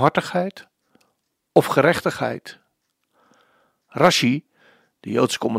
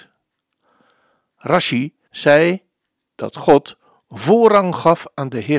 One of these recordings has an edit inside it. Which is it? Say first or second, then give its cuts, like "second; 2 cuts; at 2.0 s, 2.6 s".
second; 1 cut; at 2.1 s